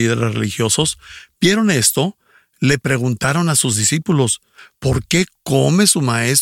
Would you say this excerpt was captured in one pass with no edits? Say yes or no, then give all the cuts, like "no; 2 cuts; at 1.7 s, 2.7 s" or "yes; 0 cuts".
yes; 0 cuts